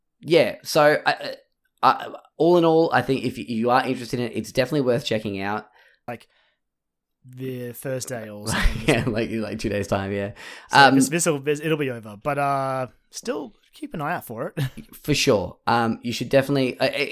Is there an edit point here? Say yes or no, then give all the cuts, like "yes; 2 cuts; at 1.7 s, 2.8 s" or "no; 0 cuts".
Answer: yes; 1 cut; at 6.1 s